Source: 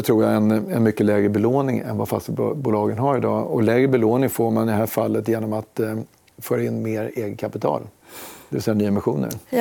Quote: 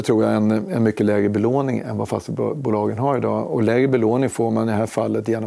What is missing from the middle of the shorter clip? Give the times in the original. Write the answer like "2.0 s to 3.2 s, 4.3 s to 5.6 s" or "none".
none

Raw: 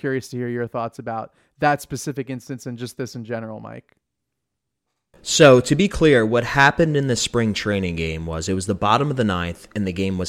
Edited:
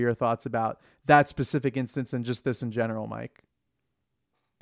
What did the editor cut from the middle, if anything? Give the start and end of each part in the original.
none

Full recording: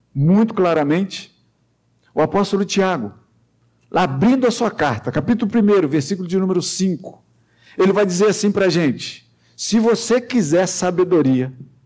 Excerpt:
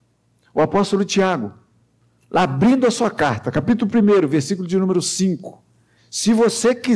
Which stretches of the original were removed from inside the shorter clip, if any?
7.6 s to 9.4 s

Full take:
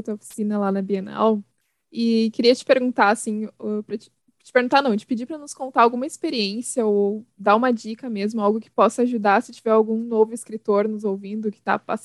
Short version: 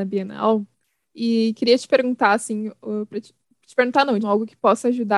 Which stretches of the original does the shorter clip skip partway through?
5.0 s to 8.3 s

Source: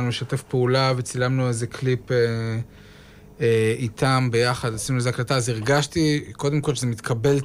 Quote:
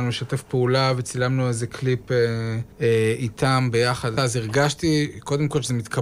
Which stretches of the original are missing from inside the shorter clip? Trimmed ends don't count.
2.7 s to 3.3 s, 4.8 s to 5.3 s

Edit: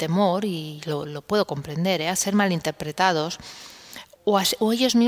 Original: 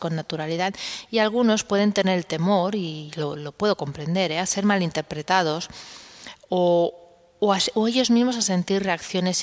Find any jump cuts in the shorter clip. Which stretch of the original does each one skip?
6.5 s to 7.3 s

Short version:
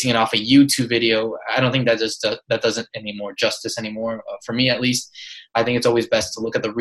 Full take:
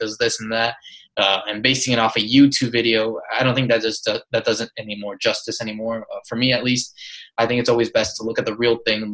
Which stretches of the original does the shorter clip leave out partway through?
none

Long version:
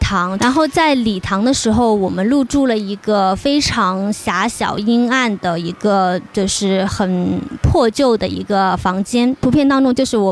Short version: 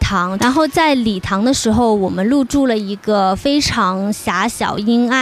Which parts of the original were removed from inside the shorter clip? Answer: none

